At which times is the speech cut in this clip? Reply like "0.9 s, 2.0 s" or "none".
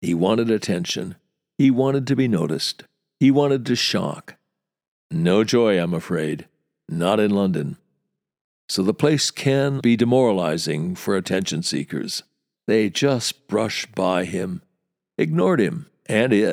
9.8 s, 12.5 s